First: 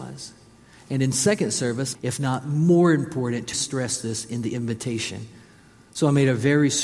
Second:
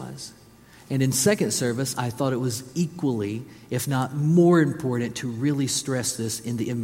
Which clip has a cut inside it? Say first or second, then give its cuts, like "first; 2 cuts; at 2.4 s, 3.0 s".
first; 2 cuts; at 1.9 s, 3.5 s